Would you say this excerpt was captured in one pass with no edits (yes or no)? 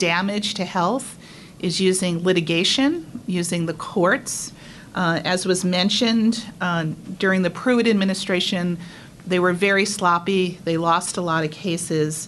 yes